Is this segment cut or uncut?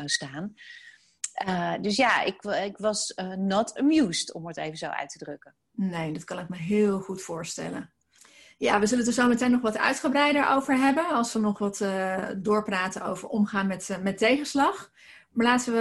uncut